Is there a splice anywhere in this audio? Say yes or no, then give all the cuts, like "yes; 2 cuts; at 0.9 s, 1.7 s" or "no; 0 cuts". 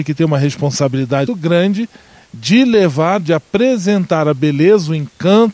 yes; 1 cut; at 1.3 s